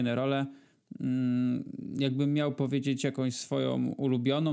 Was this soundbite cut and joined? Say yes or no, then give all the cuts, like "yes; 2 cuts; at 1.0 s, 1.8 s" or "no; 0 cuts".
no; 0 cuts